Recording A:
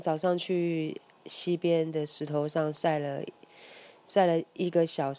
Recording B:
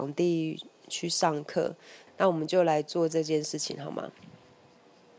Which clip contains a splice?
B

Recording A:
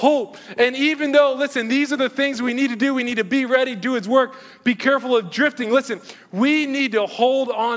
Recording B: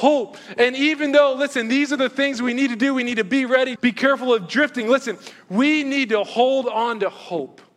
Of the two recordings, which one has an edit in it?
B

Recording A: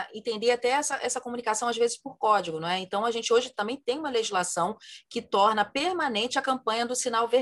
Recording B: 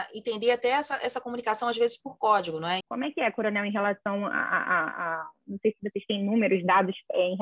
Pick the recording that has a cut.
B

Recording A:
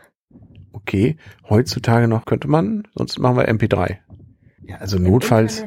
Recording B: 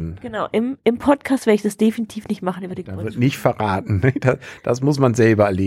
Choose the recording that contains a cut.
A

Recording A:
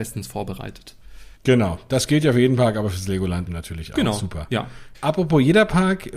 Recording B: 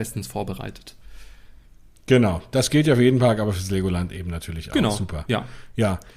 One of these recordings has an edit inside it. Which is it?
A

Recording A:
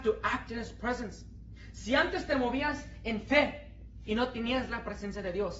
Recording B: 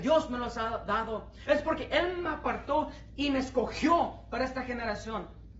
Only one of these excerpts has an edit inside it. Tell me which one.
B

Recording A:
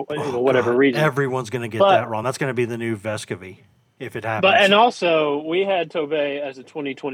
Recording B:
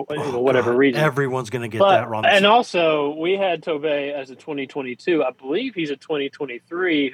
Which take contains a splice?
B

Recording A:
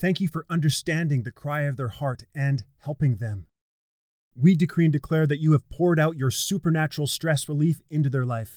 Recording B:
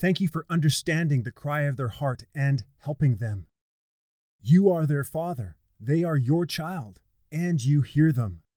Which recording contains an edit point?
A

